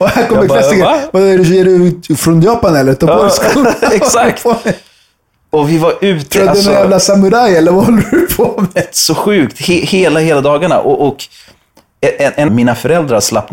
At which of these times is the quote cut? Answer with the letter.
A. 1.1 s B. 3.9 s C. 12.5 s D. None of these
C